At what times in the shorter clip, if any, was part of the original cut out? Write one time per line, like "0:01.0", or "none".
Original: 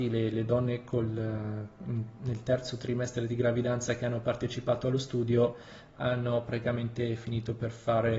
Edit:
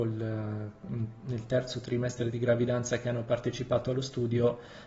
none